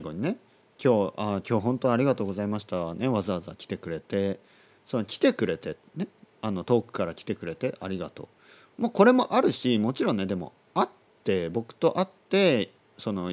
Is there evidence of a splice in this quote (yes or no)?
no